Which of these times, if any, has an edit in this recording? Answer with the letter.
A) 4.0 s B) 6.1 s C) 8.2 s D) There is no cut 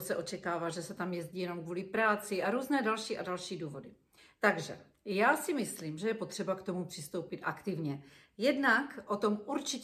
D